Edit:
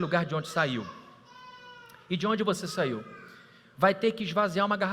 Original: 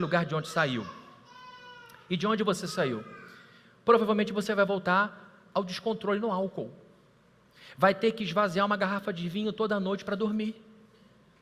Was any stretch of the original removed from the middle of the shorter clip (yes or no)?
yes